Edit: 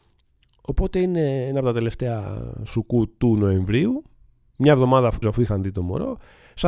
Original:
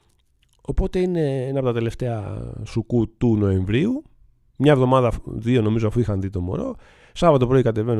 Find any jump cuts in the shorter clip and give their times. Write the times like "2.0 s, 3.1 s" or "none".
5.2 s